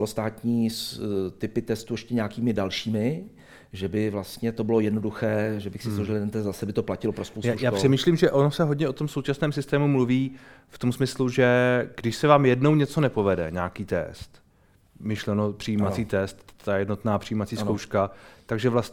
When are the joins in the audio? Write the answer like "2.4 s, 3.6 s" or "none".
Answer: none

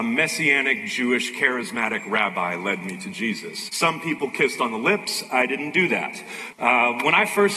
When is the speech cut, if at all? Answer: 3.7 s, 6.5 s

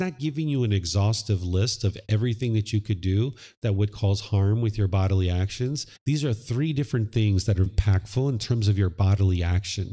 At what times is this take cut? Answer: 6.0 s, 7.7 s

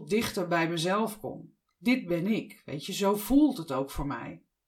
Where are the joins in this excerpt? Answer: none

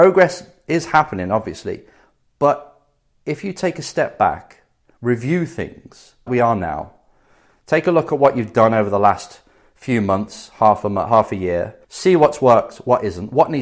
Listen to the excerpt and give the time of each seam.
6.3 s, 11.8 s

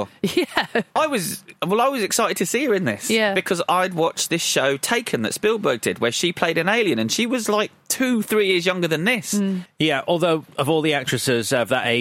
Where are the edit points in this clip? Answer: 1.0 s, 9.7 s

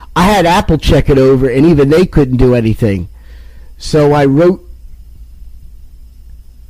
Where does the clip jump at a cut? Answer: none

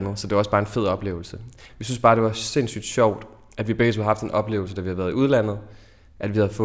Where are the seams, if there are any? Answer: 1.7 s

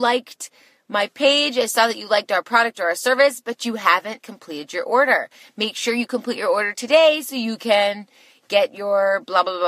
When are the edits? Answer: 4.2 s

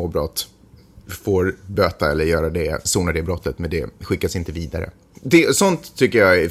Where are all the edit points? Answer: 5.1 s

